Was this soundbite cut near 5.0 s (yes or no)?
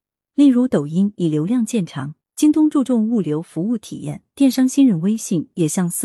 no